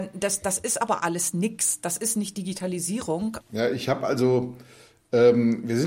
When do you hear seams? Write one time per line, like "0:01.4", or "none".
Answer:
0:03.4